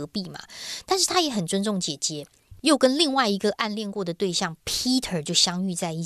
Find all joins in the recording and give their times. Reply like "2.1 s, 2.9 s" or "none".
2.6 s